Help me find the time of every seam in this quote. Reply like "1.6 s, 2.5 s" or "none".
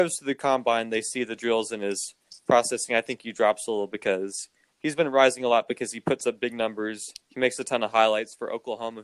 7.2 s

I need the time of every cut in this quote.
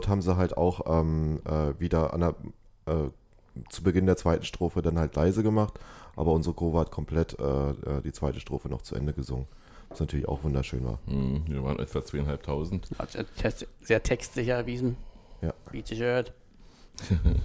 none

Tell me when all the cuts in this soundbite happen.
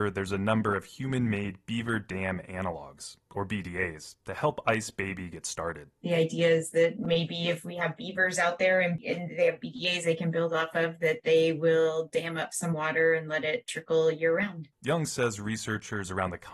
14.7 s

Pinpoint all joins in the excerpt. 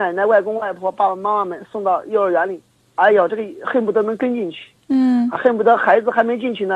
none

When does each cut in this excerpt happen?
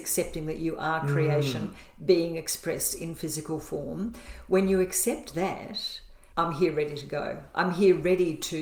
6.3 s

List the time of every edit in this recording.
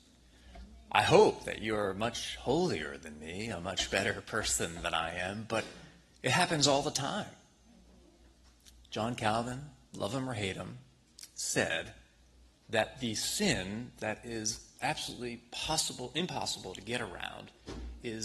none

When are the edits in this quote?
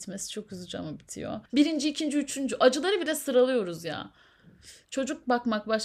1.5 s, 4.8 s

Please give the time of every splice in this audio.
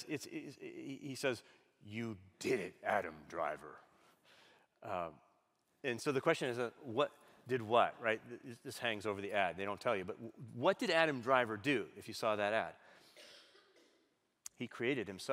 none

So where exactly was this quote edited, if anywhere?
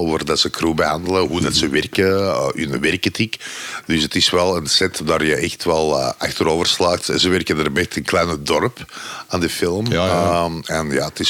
none

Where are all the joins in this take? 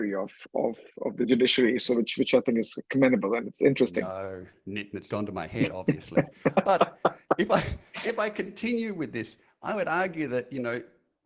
5.1 s

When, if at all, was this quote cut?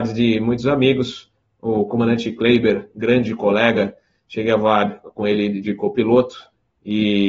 none

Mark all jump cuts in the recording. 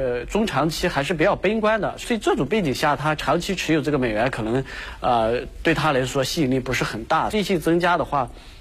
2.0 s, 7.3 s

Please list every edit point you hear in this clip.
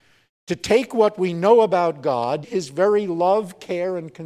2.4 s

